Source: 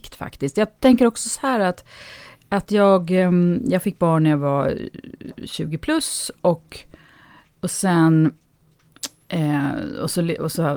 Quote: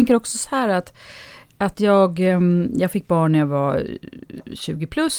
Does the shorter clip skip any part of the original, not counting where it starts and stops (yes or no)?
no